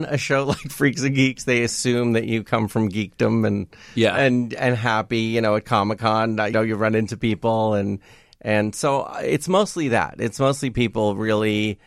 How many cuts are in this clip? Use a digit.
1